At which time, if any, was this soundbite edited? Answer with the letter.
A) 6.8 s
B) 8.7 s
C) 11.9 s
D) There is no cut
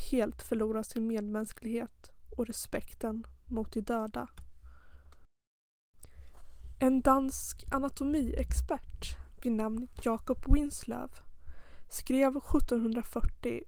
D